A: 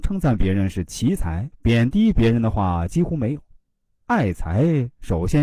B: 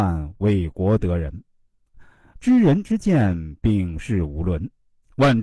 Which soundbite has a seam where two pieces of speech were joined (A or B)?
A